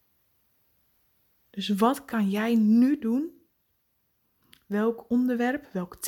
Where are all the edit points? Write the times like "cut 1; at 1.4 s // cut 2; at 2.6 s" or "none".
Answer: none